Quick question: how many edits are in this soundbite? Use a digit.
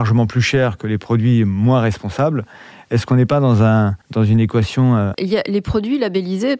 2